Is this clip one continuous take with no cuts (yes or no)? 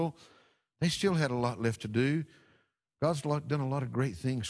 yes